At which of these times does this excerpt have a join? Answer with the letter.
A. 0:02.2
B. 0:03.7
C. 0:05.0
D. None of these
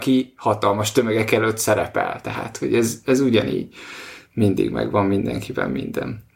D